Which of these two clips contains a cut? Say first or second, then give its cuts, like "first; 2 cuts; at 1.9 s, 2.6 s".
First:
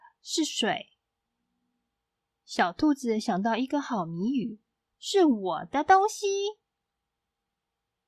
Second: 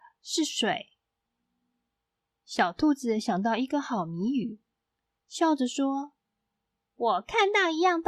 first; 1 cut; at 4.9 s